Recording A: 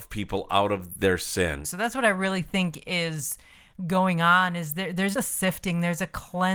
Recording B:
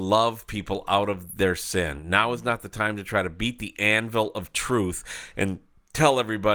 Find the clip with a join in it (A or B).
A